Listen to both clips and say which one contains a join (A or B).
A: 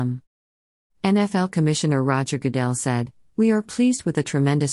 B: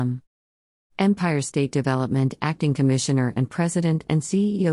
B